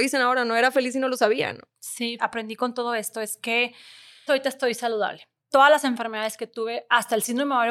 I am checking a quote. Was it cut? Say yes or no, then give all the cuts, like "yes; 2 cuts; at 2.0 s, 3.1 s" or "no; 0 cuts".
yes; 2 cuts; at 2.2 s, 4.3 s